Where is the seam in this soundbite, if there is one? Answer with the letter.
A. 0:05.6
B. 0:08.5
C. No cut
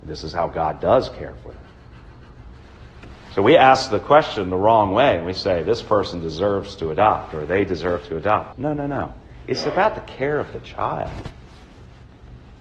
B